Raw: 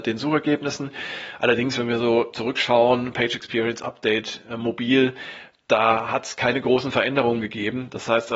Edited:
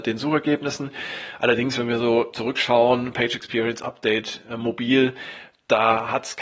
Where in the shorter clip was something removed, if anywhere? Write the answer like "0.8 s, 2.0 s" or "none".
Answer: none